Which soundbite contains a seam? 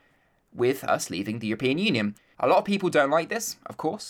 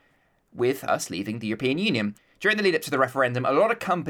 first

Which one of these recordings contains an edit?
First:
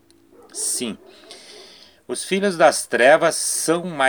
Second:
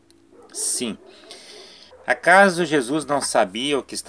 second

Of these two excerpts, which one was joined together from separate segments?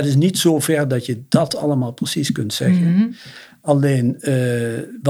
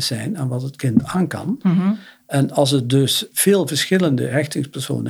second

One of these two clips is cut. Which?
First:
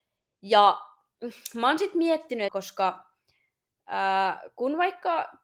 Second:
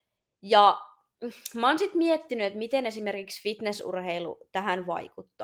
first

